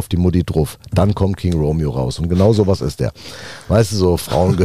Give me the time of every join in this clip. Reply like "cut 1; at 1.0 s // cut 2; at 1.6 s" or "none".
none